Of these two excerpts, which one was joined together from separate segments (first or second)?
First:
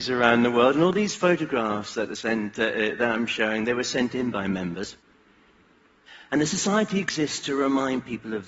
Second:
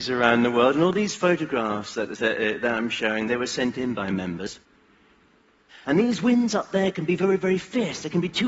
second